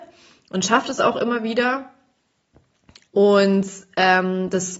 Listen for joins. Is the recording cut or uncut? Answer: cut